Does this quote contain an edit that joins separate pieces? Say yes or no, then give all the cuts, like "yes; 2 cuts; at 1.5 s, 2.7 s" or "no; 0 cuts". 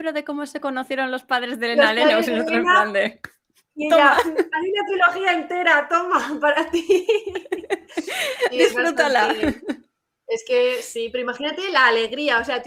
no; 0 cuts